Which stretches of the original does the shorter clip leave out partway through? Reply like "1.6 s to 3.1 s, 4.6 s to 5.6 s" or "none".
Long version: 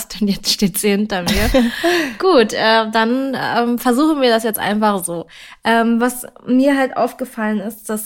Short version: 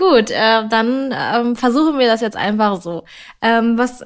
none